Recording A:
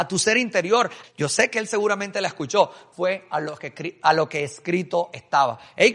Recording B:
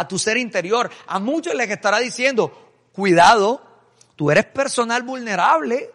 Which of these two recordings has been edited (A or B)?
A